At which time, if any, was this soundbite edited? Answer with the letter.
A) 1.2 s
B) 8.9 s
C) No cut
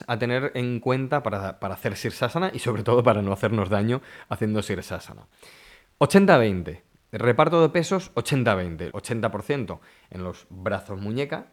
B